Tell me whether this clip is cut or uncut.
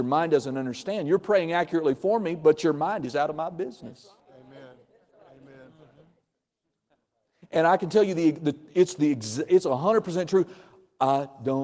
uncut